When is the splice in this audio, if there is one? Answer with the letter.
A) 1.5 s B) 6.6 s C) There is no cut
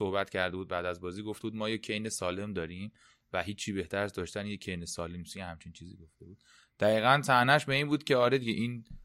C